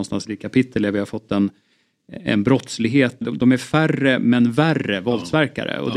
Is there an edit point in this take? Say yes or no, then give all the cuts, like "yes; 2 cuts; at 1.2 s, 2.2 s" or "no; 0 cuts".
yes; 1 cut; at 3.2 s